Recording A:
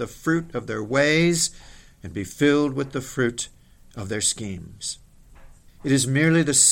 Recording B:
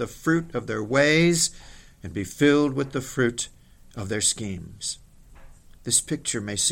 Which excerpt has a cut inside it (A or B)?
A